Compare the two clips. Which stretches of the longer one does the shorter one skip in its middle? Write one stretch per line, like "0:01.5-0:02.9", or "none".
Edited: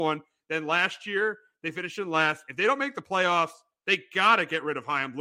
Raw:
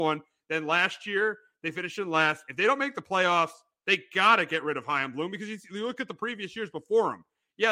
none